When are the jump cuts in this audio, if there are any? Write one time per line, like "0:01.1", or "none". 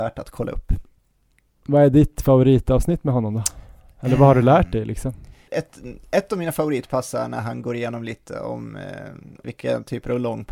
0:05.5
0:09.4